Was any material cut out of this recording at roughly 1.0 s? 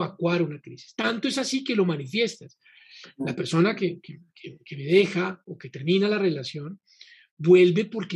no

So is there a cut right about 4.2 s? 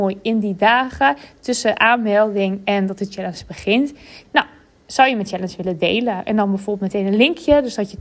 yes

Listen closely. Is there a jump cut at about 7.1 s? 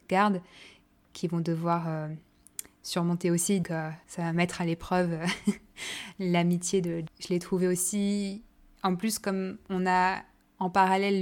yes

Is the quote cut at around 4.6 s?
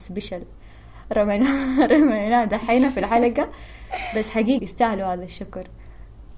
yes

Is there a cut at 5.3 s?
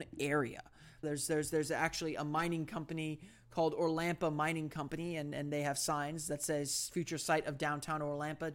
no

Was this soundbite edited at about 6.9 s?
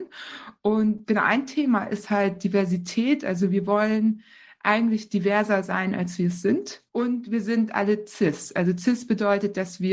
yes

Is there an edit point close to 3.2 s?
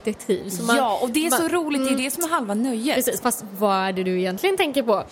yes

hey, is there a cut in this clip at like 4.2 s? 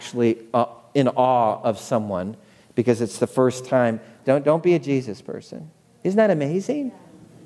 yes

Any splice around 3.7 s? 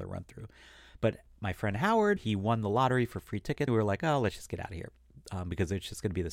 yes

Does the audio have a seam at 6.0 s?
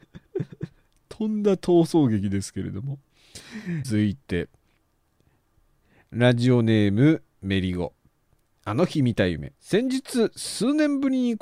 no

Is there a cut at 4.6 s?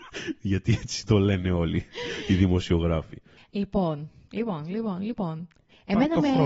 no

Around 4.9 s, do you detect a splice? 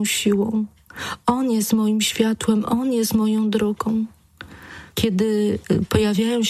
yes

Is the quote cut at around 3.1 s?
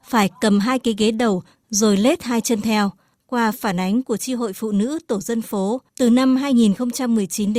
yes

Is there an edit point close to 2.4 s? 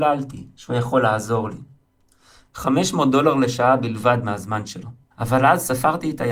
yes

